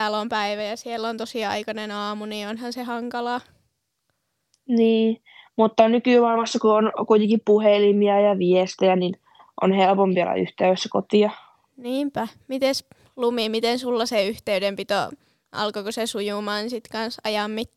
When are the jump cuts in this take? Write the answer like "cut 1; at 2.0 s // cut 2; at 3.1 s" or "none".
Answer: none

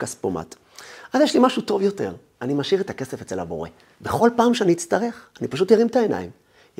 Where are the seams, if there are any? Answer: cut 1; at 3.9 s // cut 2; at 5.3 s

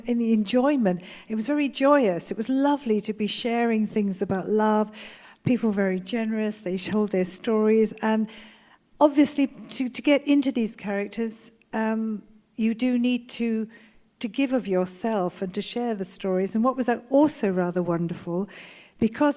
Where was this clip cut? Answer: none

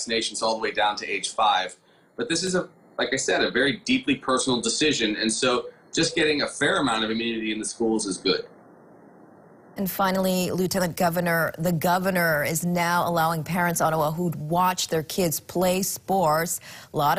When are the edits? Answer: none

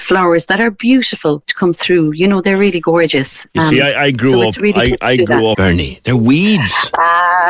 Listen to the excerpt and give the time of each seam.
cut 1; at 5.5 s

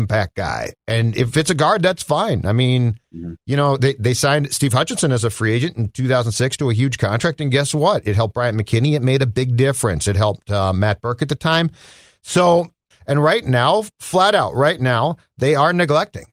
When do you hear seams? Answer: cut 1; at 12.9 s

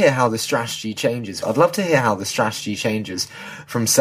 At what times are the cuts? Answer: cut 1; at 1.4 s

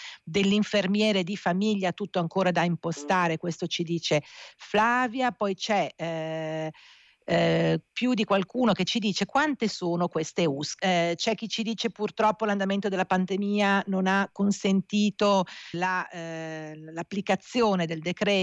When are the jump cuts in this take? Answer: cut 1; at 7.9 s // cut 2; at 10.8 s // cut 3; at 15.7 s

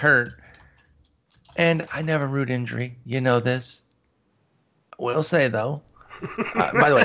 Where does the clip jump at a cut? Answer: none

